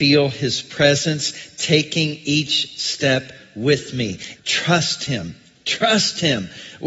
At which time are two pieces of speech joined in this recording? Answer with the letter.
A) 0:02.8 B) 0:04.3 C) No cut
B